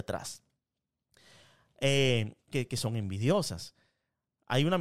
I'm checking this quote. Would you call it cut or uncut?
cut